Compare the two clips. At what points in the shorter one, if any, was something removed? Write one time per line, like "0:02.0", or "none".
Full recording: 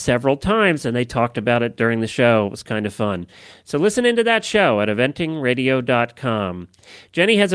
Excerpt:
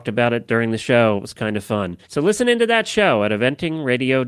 0:02.0

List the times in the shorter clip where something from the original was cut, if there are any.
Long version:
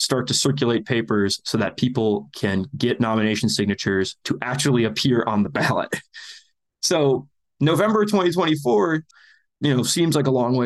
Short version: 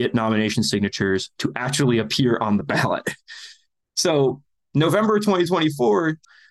none

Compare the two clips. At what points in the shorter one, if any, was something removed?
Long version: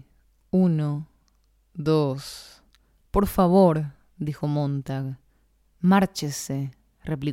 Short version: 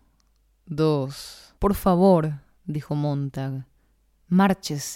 0:01.6

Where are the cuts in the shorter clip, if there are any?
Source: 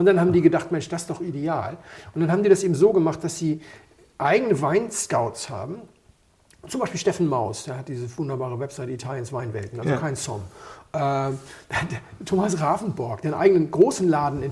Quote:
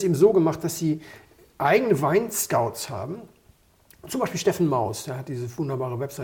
none

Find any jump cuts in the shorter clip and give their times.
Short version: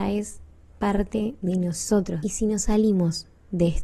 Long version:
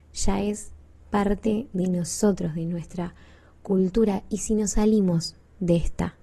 0:02.2

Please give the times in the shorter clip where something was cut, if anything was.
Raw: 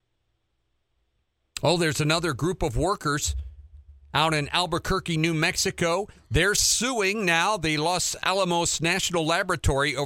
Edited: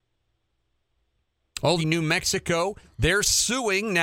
0:01.8

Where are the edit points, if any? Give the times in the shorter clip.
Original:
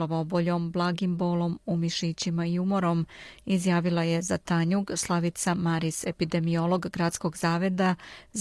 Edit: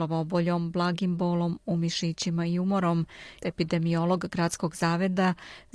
0:03.4

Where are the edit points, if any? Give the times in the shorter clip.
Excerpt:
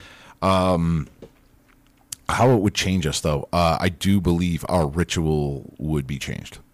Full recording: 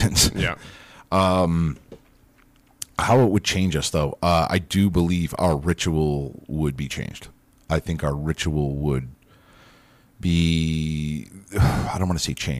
none

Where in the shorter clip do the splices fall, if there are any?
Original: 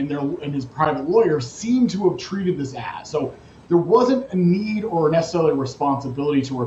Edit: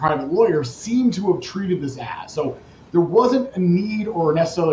none

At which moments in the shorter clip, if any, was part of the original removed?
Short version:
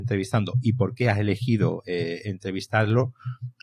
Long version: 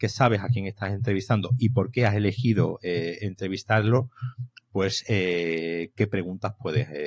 none

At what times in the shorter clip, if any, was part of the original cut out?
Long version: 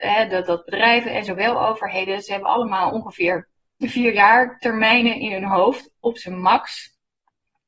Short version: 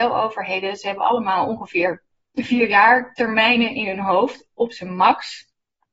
none

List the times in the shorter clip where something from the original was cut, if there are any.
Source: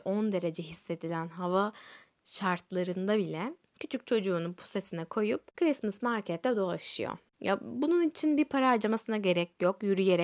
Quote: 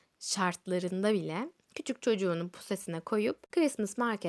none

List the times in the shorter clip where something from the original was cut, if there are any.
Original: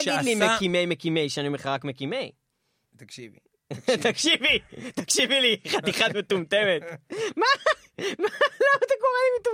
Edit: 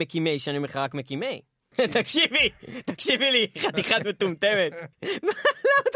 0:01.7
0:04.9

